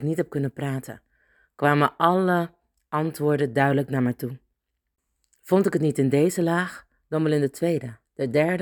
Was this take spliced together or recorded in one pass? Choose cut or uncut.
uncut